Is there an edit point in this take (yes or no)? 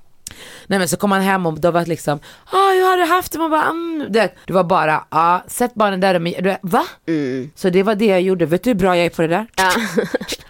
yes